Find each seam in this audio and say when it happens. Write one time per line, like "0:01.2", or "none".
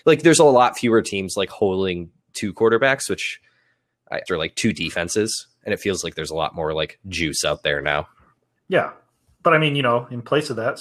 0:04.3